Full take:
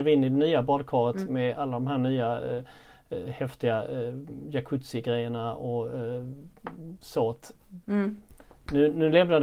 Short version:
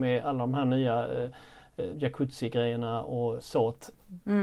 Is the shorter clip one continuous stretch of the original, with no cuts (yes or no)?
no